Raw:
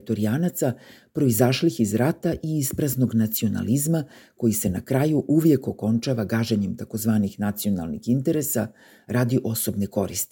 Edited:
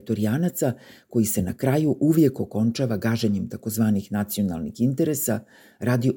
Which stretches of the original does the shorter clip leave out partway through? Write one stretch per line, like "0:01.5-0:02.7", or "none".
0:01.0-0:04.3